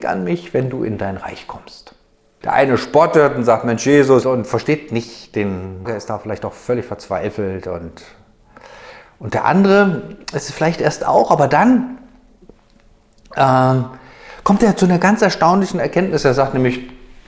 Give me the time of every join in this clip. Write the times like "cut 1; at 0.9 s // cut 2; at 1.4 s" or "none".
cut 1; at 2.4 s // cut 2; at 4.2 s // cut 3; at 5.9 s